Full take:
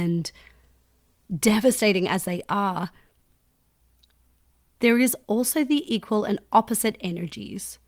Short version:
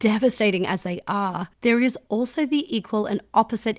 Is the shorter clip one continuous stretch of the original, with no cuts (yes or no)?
no